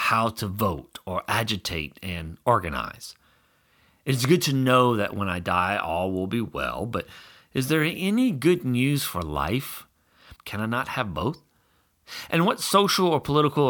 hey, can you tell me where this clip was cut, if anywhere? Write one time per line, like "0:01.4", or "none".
0:10.4